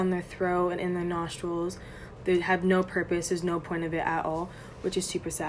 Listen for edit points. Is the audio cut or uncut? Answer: cut